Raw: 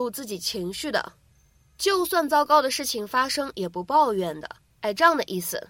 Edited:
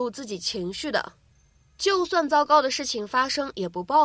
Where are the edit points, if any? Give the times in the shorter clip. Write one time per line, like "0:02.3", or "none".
none